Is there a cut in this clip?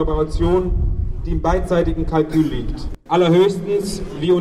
yes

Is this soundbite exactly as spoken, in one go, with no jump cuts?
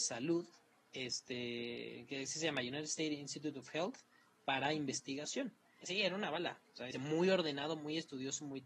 no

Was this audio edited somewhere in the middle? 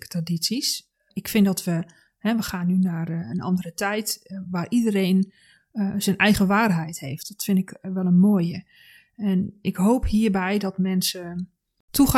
no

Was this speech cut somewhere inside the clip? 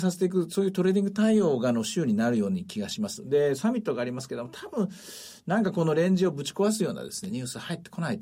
no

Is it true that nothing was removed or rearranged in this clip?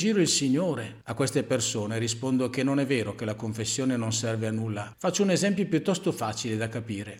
no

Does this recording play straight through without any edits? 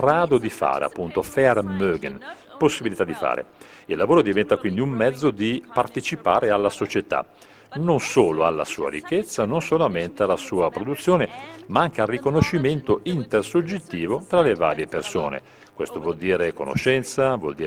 yes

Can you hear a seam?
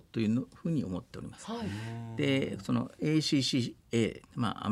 no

